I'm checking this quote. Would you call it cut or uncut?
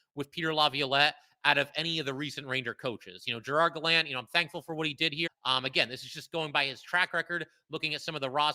cut